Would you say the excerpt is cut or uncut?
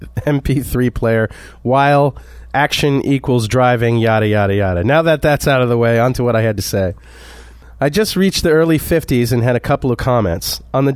uncut